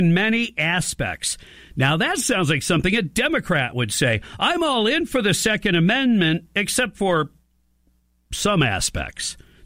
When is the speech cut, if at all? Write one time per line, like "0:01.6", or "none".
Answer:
none

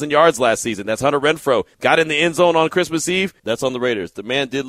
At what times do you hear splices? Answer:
0:01.7
0:03.4

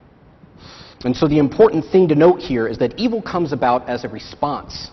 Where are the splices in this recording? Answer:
0:00.9

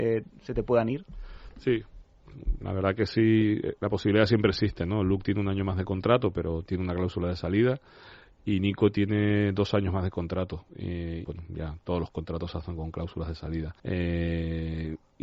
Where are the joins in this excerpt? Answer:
0:11.2
0:13.8

